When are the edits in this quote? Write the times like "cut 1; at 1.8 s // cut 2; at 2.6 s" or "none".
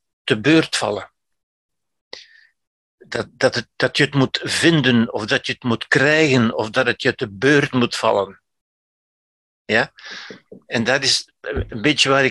none